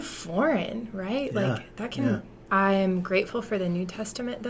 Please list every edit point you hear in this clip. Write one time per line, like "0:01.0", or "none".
0:02.5